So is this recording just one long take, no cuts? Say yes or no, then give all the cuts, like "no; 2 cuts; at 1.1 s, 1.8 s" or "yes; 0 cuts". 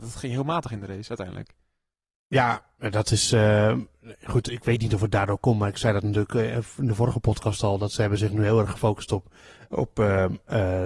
yes; 0 cuts